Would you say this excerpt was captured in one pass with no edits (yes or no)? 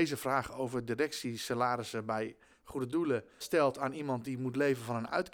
no